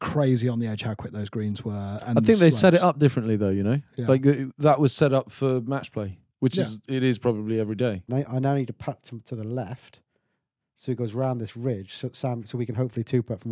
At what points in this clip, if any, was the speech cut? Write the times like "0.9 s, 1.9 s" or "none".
8.1 s